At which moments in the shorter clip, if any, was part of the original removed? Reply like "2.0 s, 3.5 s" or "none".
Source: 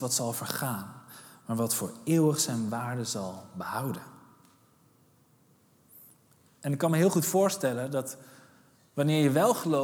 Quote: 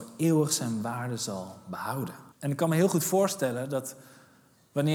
2.3 s